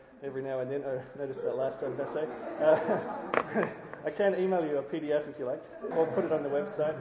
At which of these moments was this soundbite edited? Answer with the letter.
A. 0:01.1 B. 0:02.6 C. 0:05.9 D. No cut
C